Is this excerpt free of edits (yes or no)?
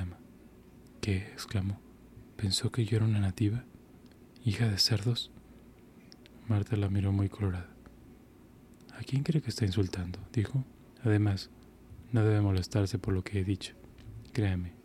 no